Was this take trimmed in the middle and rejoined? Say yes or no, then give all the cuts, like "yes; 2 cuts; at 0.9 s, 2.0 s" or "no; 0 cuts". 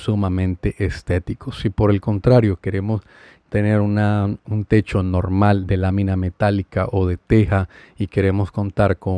yes; 1 cut; at 4.5 s